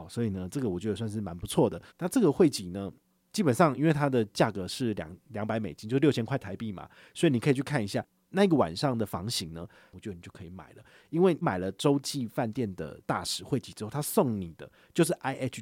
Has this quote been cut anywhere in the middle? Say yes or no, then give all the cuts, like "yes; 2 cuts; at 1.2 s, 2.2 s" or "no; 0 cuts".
yes; 2 cuts; at 1.9 s, 9.9 s